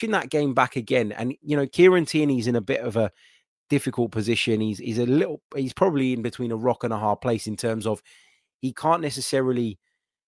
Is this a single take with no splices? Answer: yes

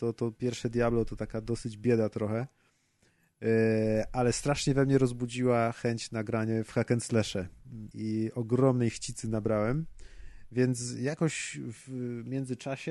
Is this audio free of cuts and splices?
no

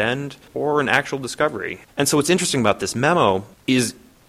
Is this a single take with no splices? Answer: no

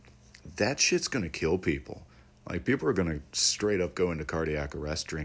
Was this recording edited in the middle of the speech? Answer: no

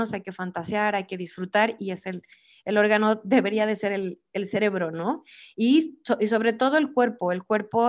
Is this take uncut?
yes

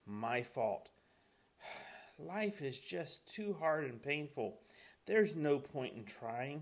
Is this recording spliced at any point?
no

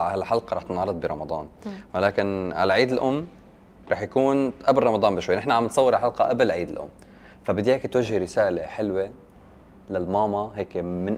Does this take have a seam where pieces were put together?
no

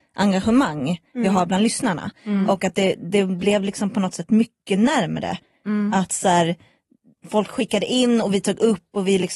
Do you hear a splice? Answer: no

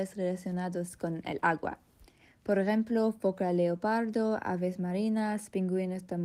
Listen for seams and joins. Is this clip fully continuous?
yes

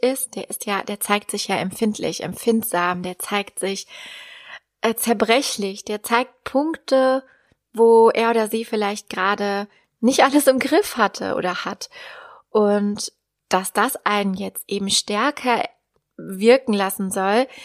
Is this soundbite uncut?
yes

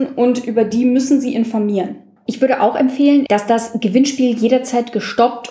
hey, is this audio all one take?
no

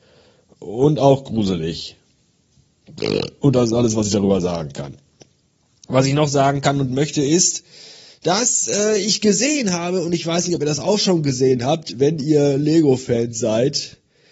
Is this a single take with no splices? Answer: yes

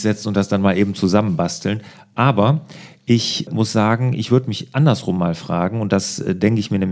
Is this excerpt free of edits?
yes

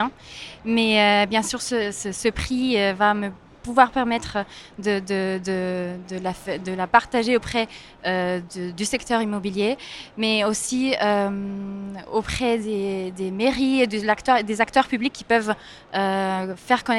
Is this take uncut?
yes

